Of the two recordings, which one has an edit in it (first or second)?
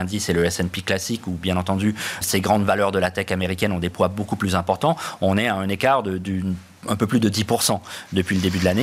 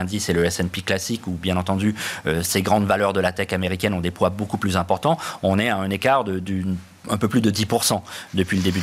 first